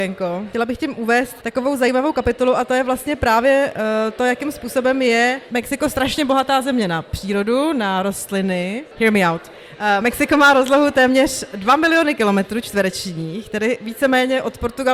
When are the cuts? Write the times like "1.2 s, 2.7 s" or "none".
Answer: none